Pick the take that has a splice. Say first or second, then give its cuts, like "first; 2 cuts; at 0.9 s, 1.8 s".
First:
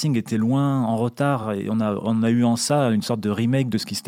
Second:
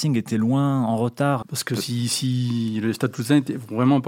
second; 1 cut; at 1.4 s